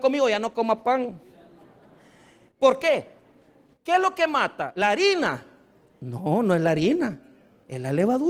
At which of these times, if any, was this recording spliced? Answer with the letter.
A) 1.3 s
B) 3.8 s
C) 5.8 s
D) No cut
D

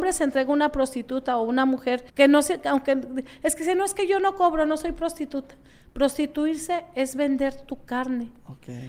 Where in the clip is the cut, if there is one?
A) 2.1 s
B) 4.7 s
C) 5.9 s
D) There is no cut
A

